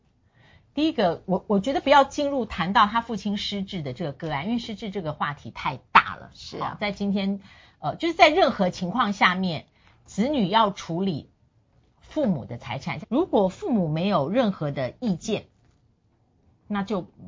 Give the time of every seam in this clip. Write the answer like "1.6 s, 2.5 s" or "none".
13.0 s